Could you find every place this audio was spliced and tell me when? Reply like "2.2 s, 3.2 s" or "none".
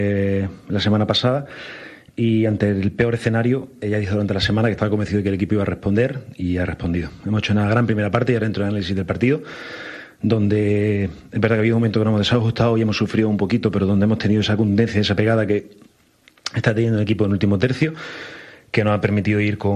none